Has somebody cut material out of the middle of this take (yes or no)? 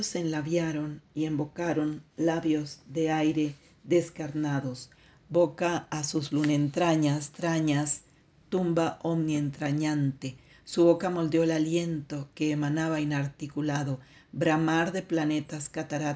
no